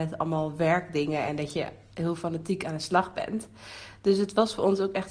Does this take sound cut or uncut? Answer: uncut